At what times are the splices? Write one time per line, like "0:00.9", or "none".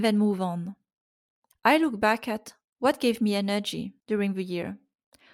0:01.5